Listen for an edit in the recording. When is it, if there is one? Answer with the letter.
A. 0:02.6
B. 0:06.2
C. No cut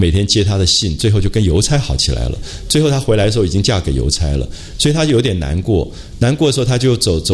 C